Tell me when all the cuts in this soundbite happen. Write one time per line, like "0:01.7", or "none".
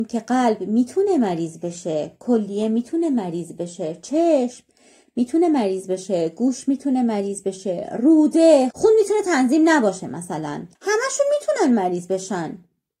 0:08.7
0:10.8